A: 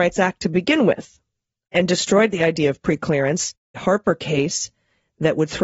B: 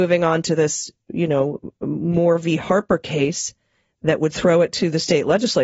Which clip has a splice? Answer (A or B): A